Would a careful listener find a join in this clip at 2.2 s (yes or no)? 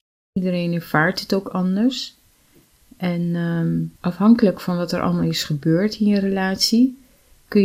no